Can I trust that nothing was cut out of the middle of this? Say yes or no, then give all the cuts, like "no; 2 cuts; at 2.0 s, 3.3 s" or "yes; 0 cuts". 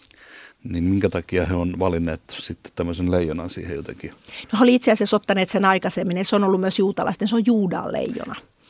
yes; 0 cuts